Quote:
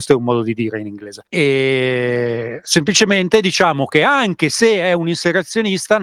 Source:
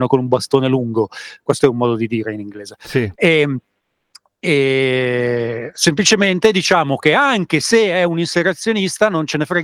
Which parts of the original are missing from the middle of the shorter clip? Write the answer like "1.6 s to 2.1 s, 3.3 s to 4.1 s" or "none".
2.8 s to 4.3 s